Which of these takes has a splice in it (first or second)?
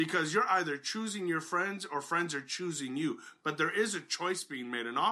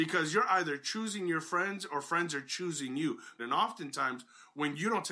second